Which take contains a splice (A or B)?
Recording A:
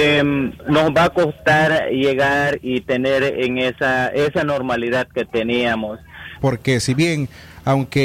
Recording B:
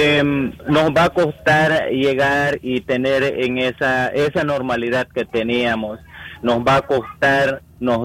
A